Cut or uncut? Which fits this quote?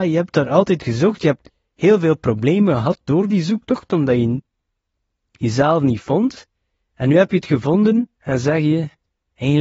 uncut